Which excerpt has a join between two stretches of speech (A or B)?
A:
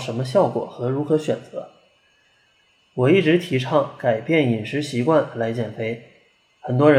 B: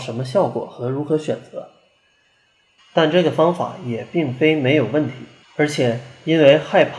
B